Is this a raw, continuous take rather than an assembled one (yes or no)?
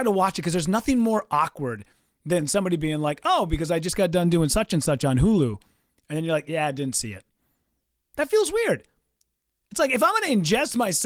yes